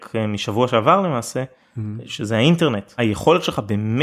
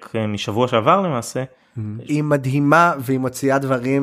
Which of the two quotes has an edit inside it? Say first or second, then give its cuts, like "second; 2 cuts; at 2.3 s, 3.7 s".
second; 1 cut; at 2.1 s